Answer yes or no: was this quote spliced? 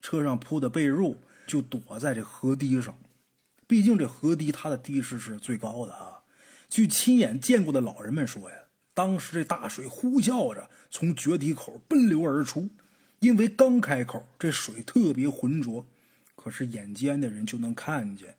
yes